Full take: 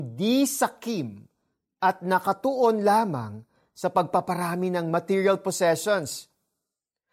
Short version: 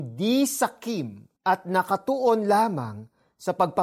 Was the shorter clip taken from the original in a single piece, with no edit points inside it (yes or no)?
no